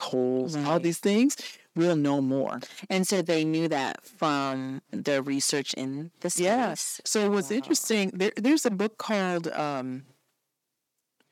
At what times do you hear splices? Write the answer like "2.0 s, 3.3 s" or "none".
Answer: none